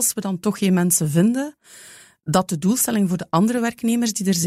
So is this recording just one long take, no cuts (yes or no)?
yes